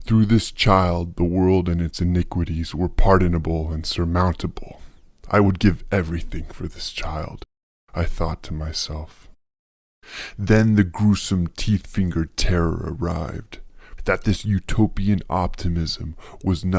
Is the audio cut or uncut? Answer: cut